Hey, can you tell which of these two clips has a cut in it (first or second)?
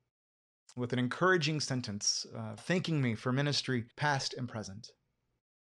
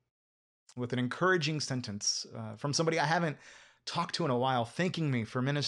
first